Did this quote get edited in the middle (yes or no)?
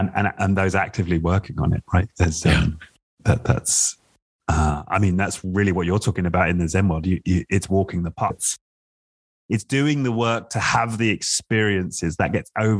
yes